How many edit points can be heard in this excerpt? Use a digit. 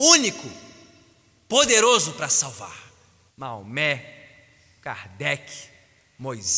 1